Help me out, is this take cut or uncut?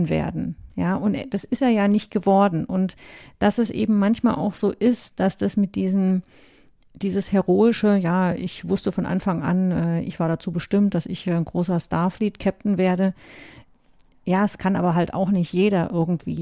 uncut